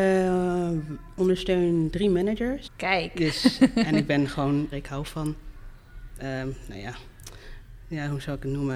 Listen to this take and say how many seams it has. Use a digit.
2